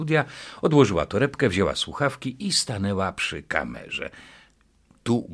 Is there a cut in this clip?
no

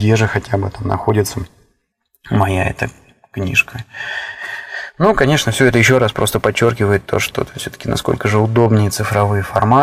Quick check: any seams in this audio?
no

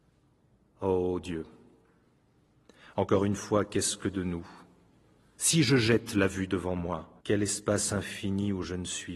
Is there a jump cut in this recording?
yes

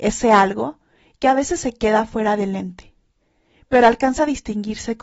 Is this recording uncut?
yes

